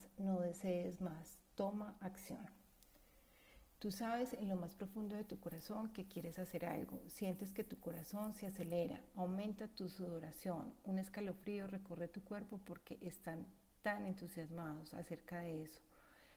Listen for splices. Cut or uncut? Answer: uncut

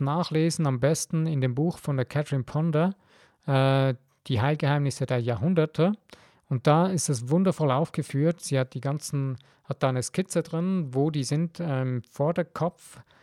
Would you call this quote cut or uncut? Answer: uncut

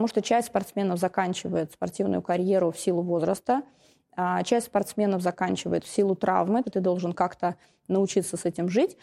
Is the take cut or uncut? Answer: cut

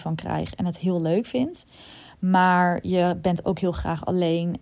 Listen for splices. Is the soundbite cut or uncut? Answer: cut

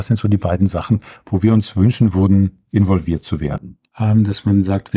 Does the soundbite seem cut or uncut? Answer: cut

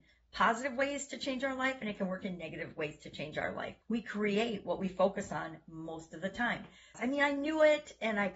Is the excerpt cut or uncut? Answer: cut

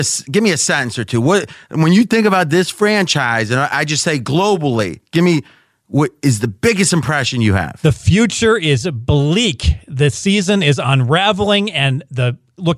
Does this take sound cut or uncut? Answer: uncut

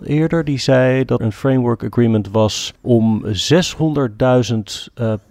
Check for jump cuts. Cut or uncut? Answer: cut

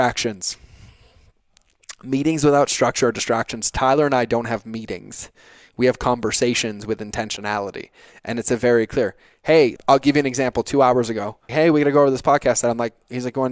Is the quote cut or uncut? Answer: cut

